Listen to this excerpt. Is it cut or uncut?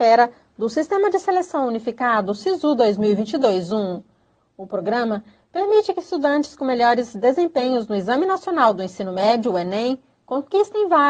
uncut